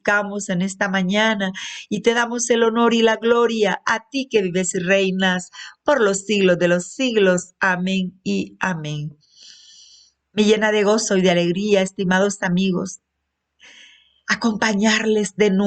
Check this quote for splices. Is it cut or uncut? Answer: uncut